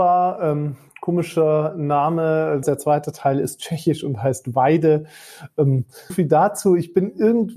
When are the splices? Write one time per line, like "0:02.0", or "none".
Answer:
0:02.6
0:06.1